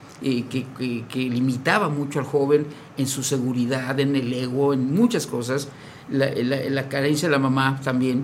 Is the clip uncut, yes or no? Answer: yes